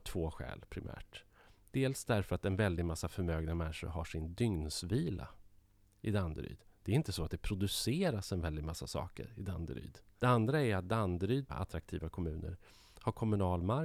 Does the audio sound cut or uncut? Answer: cut